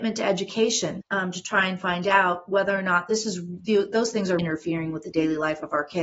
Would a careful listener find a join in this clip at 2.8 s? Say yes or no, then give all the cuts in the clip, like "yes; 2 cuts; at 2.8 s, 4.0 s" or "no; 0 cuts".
no; 2 cuts; at 1.0 s, 4.4 s